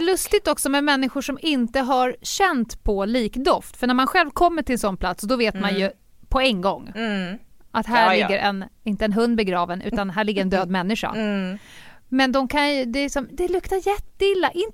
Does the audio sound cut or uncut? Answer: cut